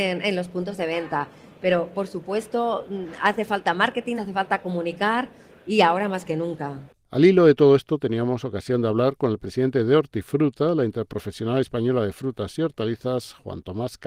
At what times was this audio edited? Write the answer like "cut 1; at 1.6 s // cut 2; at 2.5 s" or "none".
cut 1; at 4.2 s